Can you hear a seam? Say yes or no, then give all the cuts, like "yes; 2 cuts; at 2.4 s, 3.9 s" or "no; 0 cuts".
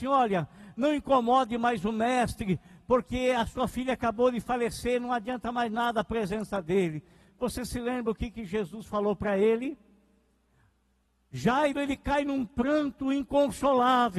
no; 0 cuts